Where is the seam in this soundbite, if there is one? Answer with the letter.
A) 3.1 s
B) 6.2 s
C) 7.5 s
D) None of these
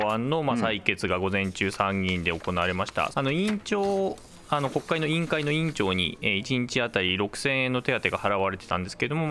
A